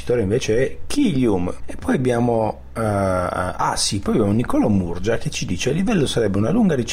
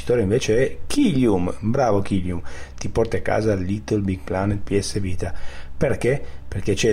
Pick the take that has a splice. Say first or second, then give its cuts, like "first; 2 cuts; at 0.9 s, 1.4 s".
first; 1 cut; at 1.6 s